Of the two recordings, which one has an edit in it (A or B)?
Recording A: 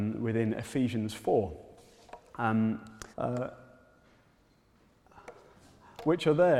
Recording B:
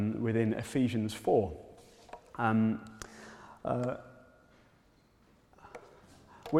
A